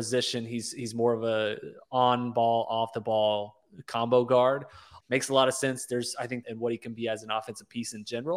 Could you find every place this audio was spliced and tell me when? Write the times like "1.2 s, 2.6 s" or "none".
5.0 s, 6.4 s